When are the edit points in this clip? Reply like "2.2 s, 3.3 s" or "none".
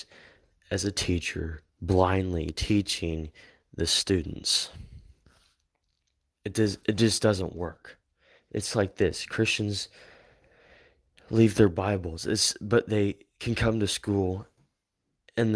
8.4 s